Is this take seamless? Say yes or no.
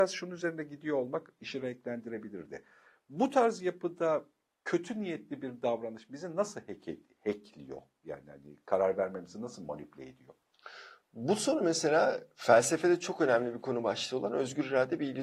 yes